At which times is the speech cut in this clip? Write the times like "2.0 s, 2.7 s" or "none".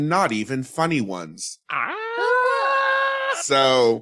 none